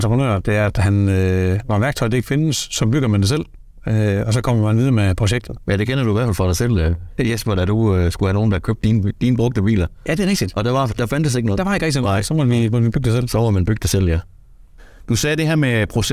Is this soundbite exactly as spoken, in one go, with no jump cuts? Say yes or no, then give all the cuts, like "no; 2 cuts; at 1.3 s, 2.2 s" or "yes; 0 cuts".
yes; 0 cuts